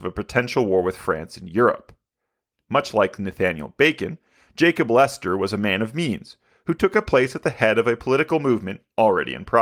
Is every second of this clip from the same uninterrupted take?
no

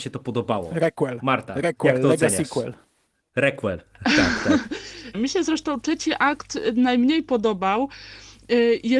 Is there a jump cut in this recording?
yes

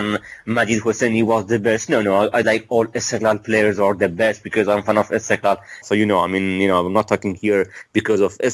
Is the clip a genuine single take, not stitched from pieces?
no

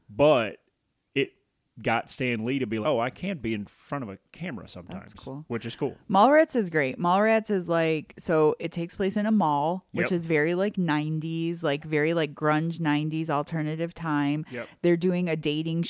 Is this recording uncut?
no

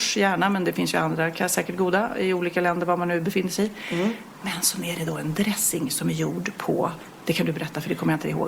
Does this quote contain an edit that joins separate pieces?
no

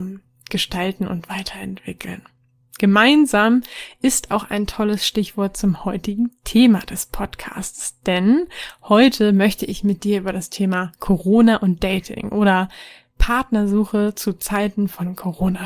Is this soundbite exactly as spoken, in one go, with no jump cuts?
yes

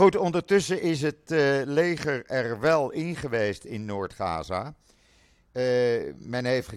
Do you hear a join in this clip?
no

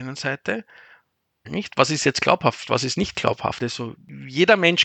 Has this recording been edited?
yes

